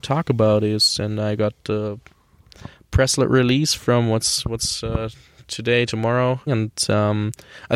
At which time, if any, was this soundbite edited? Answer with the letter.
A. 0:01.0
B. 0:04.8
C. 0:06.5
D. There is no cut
C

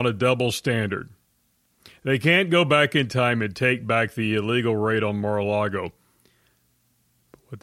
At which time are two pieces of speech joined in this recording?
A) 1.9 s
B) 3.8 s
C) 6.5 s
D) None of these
D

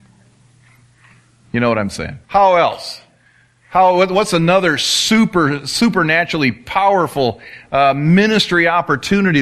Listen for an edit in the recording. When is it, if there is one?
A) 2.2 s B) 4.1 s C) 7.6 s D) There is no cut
A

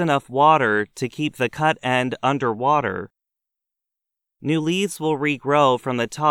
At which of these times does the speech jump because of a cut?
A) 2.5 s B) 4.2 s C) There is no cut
C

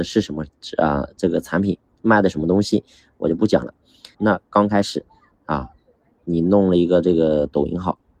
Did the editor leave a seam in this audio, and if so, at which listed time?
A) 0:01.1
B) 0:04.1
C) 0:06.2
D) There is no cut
B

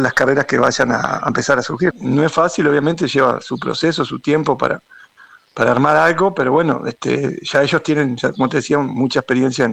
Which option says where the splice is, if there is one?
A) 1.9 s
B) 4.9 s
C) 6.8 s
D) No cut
A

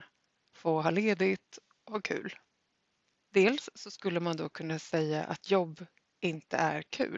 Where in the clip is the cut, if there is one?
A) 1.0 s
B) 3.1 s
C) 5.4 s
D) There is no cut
B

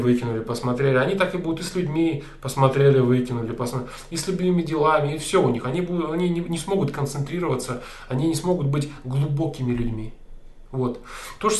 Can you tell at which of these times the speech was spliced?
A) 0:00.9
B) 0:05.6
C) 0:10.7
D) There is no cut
D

